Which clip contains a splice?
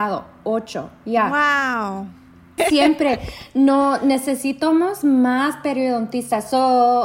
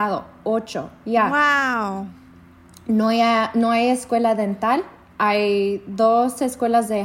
first; 1 cut; at 2.6 s

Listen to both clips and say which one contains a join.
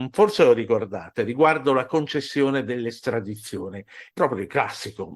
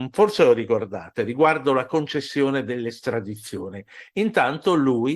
first; 1 cut; at 4.1 s

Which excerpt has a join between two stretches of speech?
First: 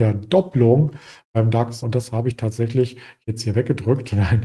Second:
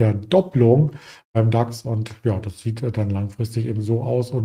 first; 1 cut; at 1.8 s

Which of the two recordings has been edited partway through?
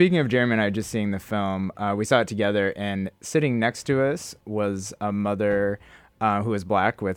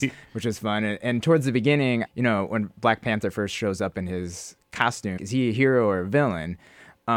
second; 2 cuts; at 2.1 s, 5.2 s

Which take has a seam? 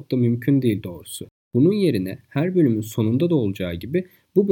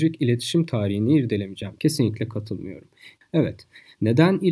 second; 2 cuts; at 1.8 s, 3.2 s

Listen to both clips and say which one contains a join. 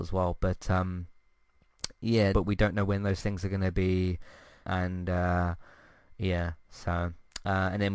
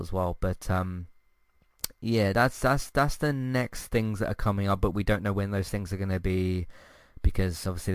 first; 2 cuts; at 2.3 s, 4.6 s

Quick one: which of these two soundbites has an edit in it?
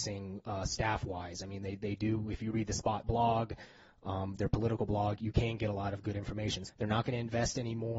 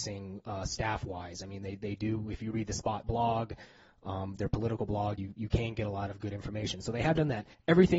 first; 2 cuts; at 5.2 s, 6.7 s

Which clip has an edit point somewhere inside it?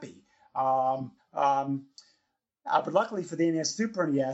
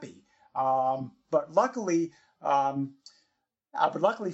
first; 1 cut; at 1.2 s

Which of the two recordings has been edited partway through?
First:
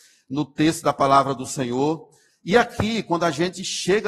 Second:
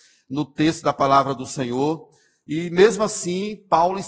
first; 1 cut; at 2.3 s

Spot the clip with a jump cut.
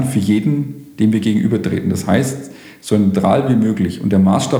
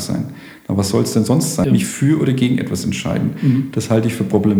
second; 1 cut; at 1.6 s

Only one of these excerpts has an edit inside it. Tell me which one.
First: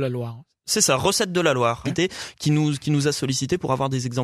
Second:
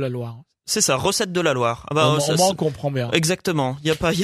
first; 1 cut; at 1.9 s

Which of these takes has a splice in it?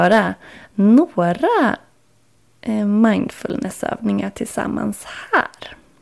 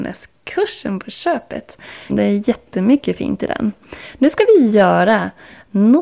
second; 1 cut; at 2.1 s

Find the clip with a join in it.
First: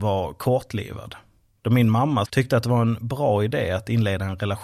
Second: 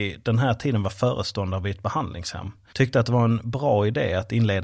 first; 1 cut; at 2.3 s

